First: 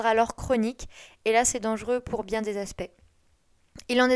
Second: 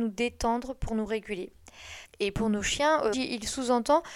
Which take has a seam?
second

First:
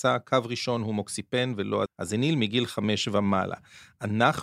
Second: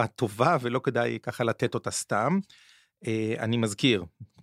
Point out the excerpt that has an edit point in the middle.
first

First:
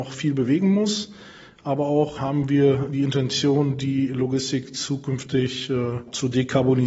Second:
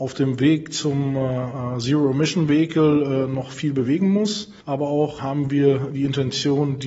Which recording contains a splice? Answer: second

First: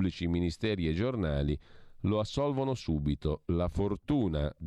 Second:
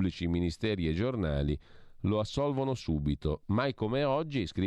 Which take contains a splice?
second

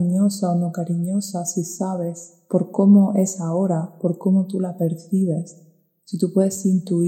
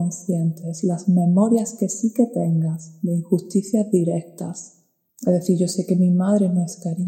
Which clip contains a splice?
second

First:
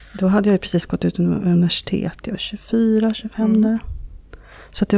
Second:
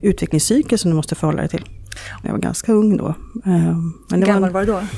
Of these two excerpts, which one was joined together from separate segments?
second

